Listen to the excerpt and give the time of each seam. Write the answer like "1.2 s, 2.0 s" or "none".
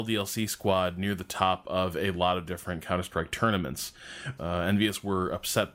4.4 s